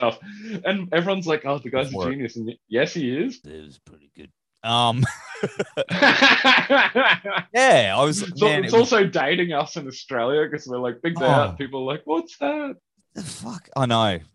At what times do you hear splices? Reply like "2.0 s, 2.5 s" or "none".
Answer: 3.4 s